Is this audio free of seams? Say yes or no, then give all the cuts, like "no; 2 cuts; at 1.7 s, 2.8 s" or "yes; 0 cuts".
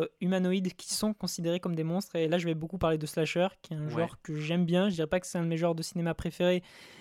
yes; 0 cuts